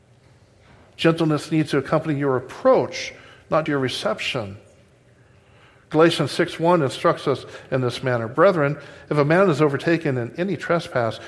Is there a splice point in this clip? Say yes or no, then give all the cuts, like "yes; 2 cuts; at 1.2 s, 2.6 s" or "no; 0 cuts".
yes; 1 cut; at 3.7 s